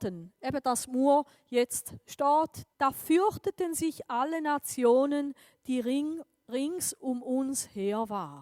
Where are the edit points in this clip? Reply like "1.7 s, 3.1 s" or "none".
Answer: 2.7 s